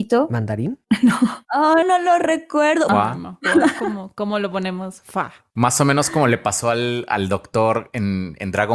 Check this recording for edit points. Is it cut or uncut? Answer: cut